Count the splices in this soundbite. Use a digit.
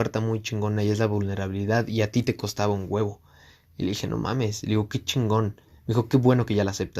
0